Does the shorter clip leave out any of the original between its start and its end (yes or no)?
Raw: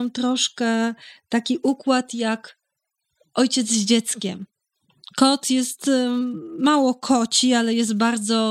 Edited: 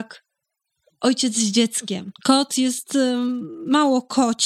yes